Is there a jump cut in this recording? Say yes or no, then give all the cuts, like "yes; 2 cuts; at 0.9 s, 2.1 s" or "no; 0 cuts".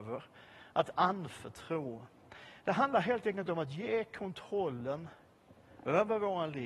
no; 0 cuts